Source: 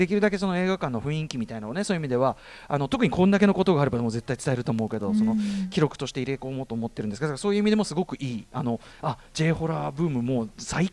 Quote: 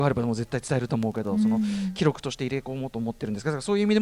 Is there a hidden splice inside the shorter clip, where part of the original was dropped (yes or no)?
no